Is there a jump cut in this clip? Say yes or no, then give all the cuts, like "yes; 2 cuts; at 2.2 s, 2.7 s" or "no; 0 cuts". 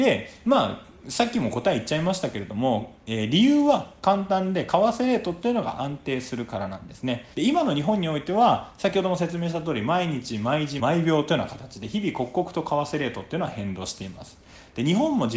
yes; 2 cuts; at 7.3 s, 10.8 s